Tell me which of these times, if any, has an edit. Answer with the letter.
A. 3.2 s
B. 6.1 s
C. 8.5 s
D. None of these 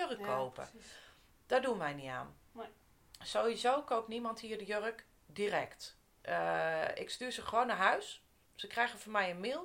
D